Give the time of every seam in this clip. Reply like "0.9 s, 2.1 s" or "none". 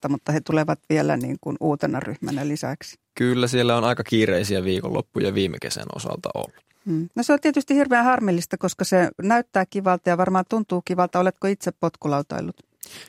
none